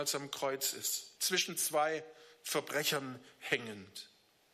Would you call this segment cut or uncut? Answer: cut